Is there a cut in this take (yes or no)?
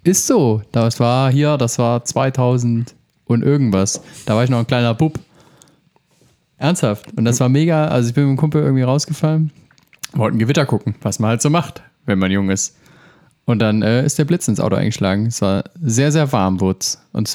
no